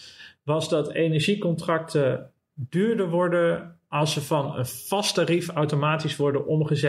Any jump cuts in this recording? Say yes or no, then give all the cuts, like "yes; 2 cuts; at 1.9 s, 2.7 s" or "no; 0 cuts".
no; 0 cuts